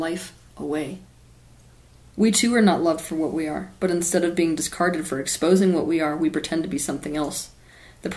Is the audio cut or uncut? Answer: cut